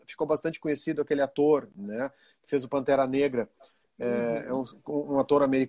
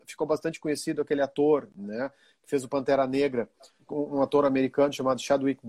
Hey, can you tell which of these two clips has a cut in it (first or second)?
second